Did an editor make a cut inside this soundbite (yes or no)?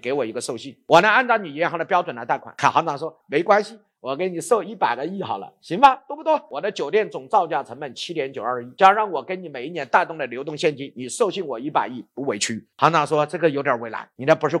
yes